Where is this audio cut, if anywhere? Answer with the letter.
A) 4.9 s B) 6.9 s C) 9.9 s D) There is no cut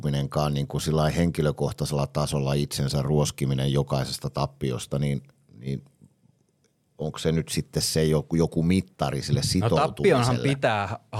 D